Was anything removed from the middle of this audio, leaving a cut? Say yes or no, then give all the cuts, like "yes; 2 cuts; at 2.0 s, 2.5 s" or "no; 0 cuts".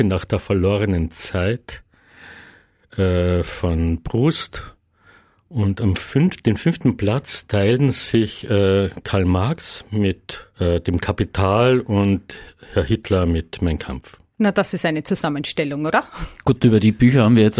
yes; 1 cut; at 10.5 s